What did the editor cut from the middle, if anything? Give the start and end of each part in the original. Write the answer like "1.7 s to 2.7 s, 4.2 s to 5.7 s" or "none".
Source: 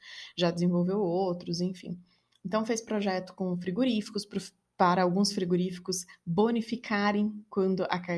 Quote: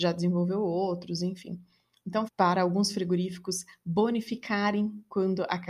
2.7 s to 4.7 s